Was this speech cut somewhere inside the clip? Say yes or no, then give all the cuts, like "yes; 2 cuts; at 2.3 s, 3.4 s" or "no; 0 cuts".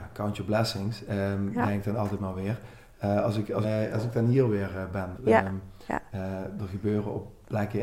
yes; 2 cuts; at 3.6 s, 5.2 s